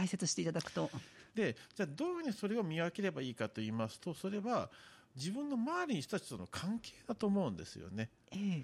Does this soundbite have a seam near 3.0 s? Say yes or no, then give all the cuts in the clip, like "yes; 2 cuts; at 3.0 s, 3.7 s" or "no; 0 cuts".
no; 1 cut; at 1.3 s